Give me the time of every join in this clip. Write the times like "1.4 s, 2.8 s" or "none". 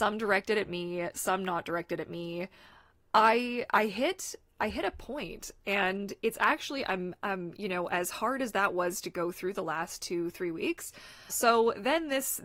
11.3 s